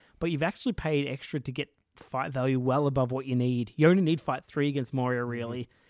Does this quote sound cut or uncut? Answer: uncut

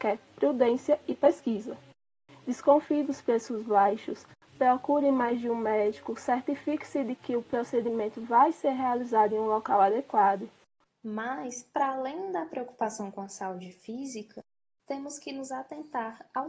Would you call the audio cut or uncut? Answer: cut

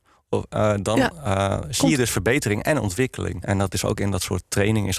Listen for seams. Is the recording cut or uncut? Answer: cut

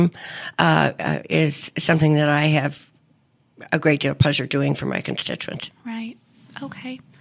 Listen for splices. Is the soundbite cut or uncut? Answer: uncut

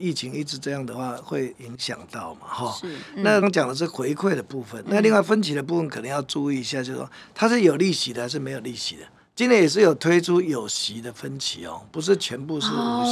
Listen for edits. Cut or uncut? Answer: cut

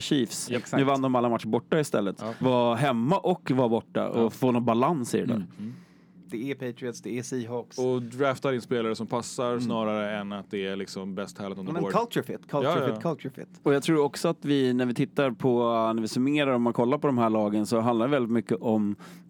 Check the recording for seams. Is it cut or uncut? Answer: cut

